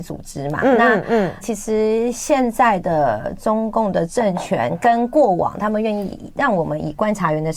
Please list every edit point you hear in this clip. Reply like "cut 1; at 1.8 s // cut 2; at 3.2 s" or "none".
cut 1; at 1.4 s